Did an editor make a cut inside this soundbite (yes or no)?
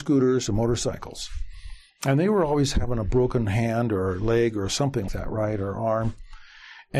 yes